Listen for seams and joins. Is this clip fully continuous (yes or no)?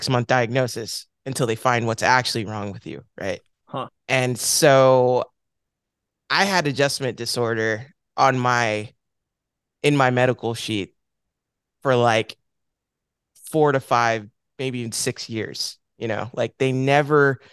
yes